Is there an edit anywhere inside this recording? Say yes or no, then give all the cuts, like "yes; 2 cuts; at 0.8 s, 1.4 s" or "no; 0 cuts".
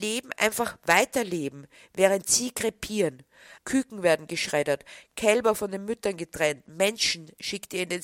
yes; 1 cut; at 3.6 s